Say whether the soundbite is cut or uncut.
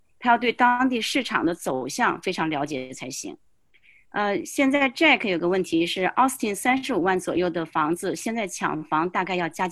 uncut